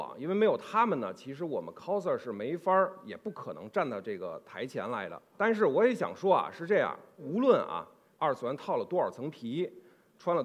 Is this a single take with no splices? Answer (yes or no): yes